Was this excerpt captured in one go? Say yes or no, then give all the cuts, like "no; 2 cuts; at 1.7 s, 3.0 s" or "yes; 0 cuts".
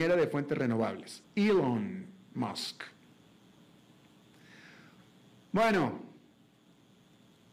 no; 1 cut; at 1.2 s